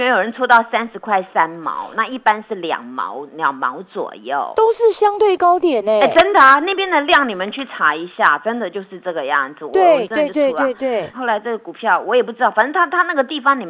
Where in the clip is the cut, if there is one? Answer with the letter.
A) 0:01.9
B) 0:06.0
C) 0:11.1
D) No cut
C